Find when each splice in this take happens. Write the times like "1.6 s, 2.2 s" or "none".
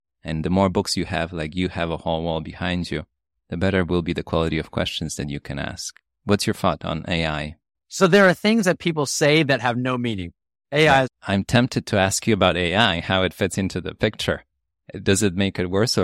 11.0 s